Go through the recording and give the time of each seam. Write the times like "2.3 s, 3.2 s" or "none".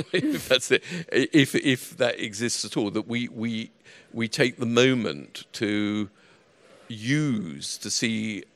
none